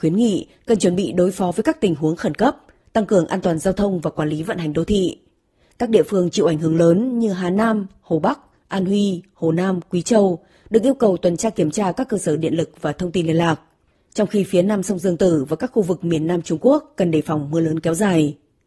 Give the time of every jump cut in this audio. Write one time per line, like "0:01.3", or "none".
none